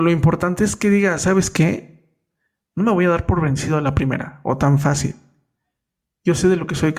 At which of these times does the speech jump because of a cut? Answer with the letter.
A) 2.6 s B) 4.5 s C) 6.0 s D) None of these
D